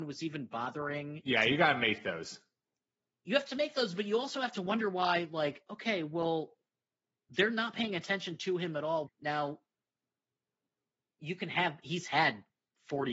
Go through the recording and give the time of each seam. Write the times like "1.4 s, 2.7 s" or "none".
9.1 s